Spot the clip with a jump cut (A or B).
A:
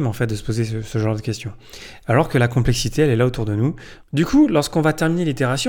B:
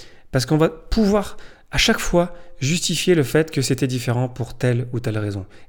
A